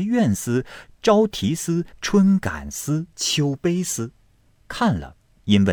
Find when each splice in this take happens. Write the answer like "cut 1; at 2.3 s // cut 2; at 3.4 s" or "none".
cut 1; at 1.9 s // cut 2; at 3.1 s // cut 3; at 4.2 s